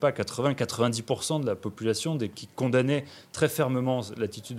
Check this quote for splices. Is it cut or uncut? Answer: cut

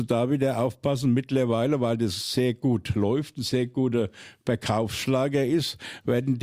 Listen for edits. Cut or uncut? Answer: uncut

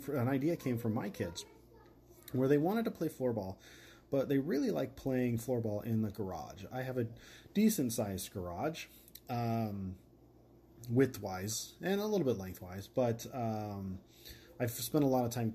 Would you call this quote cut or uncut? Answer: uncut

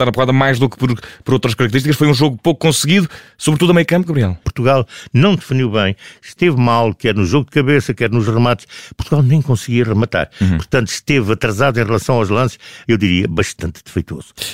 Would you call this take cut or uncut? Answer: cut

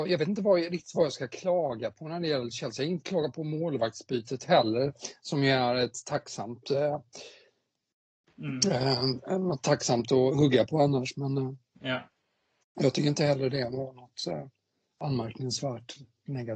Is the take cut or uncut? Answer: uncut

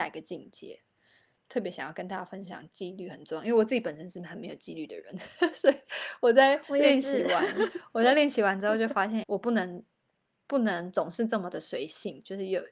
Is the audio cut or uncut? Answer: cut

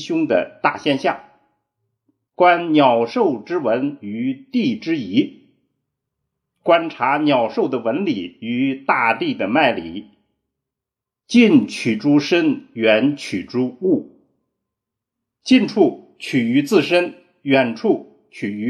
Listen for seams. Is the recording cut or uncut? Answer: cut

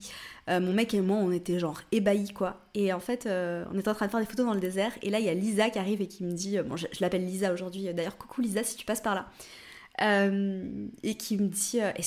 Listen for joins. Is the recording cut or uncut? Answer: uncut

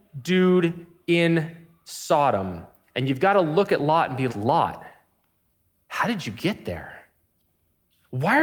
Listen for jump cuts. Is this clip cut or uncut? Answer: cut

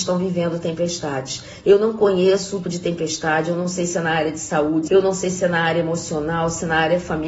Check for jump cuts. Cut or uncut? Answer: cut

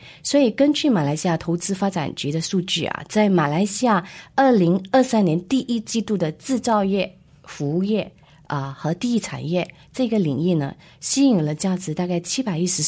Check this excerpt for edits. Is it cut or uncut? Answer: uncut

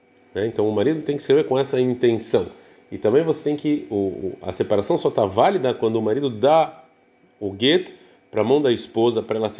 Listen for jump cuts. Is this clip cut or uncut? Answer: uncut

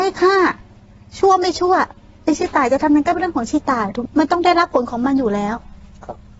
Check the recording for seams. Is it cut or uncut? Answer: cut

